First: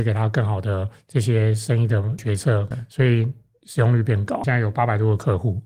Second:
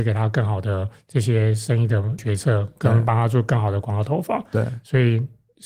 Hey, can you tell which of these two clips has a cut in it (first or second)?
first